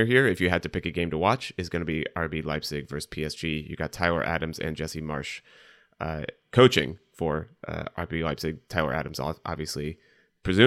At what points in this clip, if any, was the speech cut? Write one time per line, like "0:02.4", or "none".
none